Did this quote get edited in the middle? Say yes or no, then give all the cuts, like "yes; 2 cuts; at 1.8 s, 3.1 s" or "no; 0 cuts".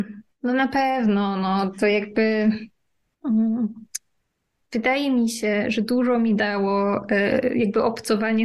no; 0 cuts